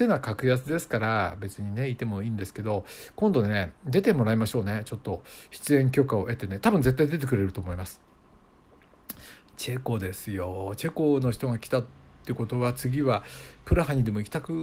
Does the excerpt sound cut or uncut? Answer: uncut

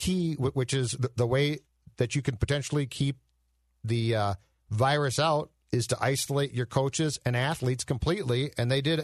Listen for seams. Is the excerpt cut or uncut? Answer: uncut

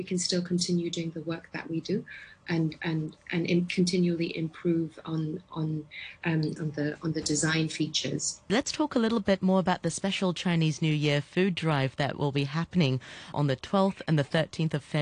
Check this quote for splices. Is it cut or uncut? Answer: cut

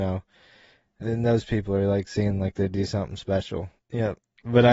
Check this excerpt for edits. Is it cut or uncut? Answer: cut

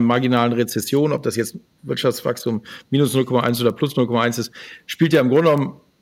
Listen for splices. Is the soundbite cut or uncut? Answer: uncut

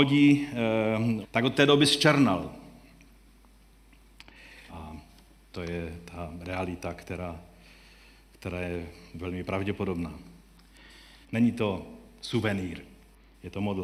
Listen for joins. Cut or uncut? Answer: cut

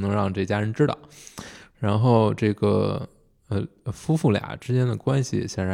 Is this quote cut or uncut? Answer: uncut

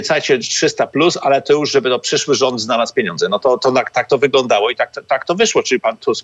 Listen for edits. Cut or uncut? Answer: uncut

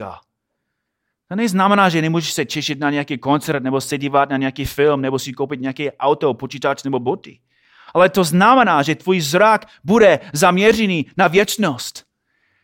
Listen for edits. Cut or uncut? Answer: uncut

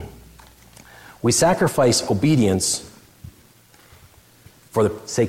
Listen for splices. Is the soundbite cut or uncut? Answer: uncut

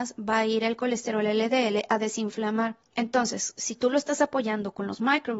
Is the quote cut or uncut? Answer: uncut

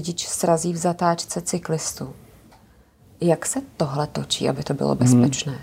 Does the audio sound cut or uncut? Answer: uncut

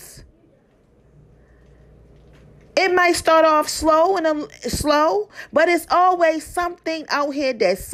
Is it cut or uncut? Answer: uncut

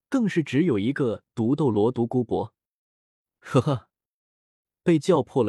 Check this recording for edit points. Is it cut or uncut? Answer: uncut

